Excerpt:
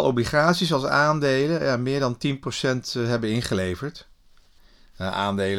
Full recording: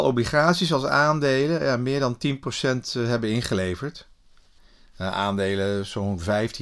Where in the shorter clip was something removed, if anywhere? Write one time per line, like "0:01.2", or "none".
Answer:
none